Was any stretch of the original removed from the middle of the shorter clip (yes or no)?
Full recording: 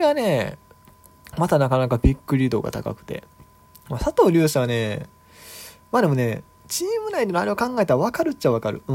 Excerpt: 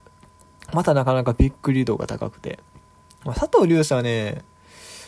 no